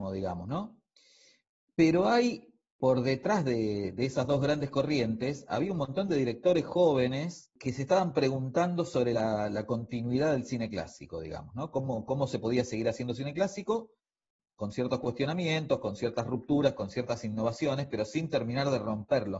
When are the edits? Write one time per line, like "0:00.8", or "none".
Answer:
none